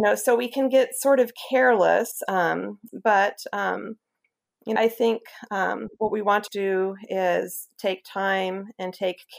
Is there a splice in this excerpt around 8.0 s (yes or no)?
no